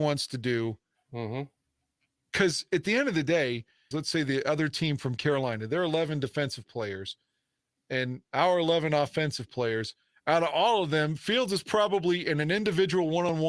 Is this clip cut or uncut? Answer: cut